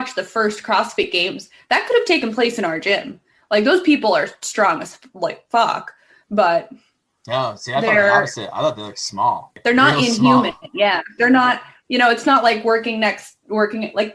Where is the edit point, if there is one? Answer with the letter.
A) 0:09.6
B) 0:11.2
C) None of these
B